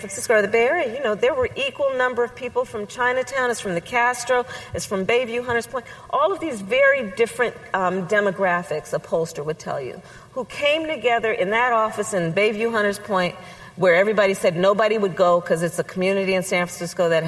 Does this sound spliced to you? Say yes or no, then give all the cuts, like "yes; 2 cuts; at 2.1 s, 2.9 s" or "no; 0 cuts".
no; 0 cuts